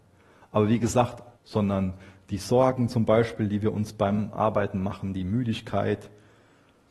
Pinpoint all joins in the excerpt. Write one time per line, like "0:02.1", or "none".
0:01.3